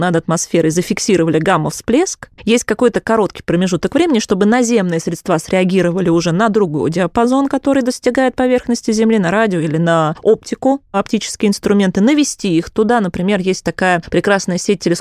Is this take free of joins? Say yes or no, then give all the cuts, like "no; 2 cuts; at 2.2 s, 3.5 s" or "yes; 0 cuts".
yes; 0 cuts